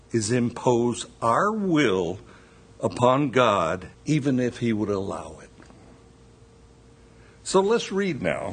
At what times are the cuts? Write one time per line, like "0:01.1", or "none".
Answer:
0:03.9